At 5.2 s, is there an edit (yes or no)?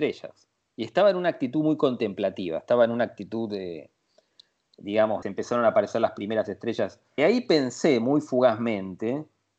yes